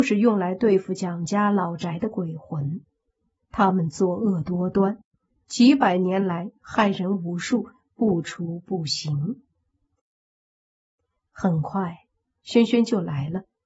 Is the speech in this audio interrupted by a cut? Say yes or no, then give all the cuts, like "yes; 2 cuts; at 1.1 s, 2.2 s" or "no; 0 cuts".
no; 0 cuts